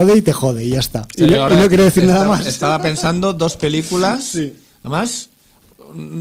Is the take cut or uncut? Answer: uncut